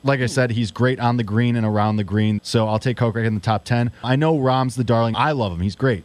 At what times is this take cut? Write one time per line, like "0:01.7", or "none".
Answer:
0:02.4
0:04.0
0:05.1